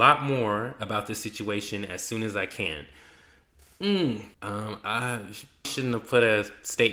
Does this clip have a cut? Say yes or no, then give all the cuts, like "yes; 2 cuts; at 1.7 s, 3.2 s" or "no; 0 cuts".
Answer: yes; 2 cuts; at 4.3 s, 5.6 s